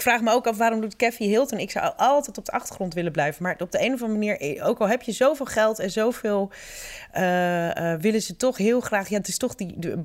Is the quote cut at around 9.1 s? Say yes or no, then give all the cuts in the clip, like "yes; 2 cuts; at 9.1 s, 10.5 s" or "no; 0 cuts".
no; 0 cuts